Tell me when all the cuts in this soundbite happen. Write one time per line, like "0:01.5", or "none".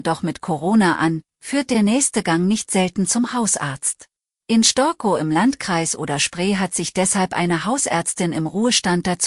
0:04.4